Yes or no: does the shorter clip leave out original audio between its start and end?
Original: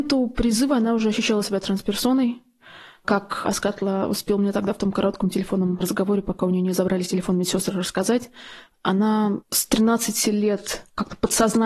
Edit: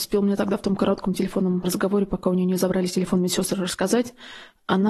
no